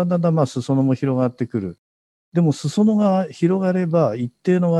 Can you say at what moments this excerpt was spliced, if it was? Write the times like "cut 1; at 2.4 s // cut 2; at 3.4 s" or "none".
none